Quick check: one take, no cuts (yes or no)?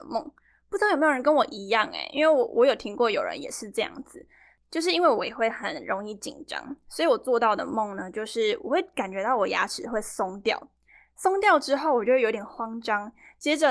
yes